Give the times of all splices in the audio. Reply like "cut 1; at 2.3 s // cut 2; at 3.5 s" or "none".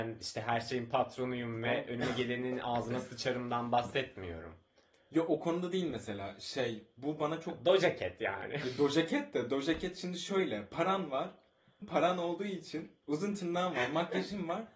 cut 1; at 11.8 s // cut 2; at 13.0 s